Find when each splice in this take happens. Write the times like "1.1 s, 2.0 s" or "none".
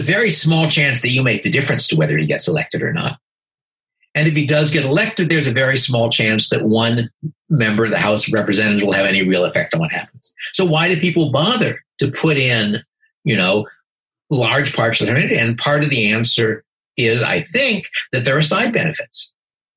11.9 s